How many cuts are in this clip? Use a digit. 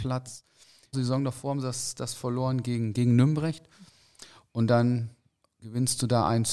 1